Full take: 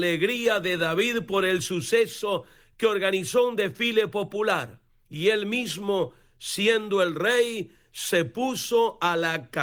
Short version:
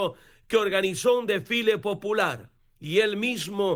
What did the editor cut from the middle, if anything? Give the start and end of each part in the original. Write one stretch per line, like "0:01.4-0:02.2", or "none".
none